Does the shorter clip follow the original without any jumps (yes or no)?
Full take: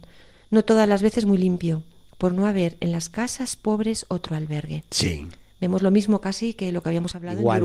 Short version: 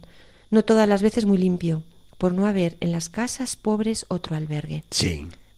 yes